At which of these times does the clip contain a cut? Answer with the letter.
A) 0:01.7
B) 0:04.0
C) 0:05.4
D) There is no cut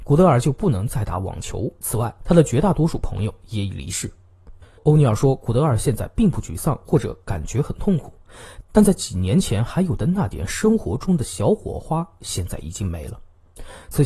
D